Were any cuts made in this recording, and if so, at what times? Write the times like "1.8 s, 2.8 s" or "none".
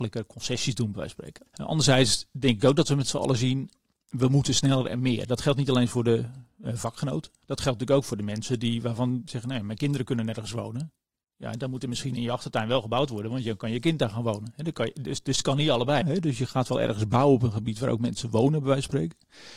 1.5 s, 16.0 s